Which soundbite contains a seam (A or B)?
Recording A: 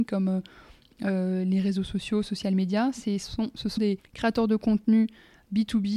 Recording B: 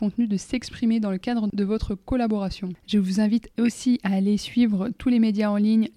A